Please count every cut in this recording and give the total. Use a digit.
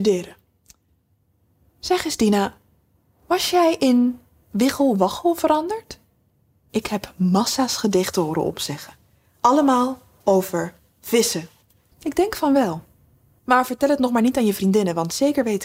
2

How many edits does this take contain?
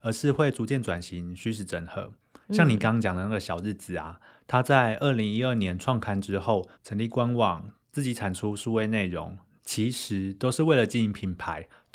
2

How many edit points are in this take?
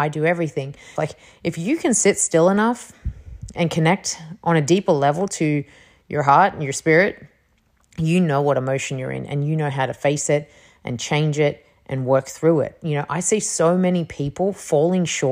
2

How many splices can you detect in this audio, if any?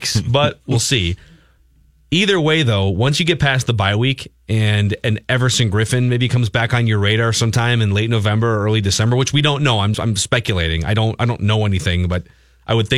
1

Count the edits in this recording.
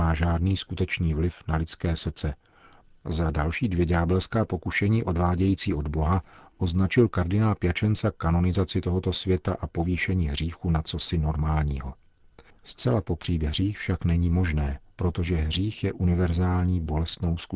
2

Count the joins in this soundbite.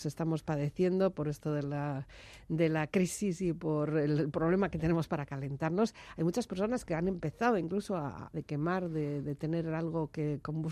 1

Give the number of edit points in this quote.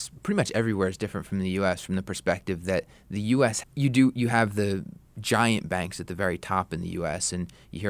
1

